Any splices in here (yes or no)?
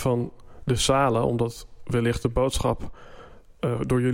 no